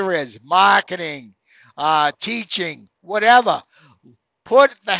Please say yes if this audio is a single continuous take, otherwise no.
yes